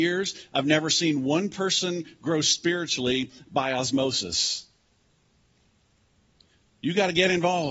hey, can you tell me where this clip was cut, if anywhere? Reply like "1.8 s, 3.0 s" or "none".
none